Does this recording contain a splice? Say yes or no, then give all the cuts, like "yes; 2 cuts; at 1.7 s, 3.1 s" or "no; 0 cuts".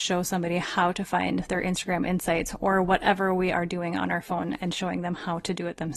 no; 0 cuts